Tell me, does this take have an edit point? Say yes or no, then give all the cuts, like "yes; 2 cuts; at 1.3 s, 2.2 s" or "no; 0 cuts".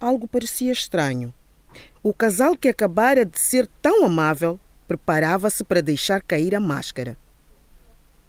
yes; 1 cut; at 1.9 s